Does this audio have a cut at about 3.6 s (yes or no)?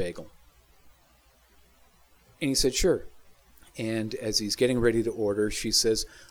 yes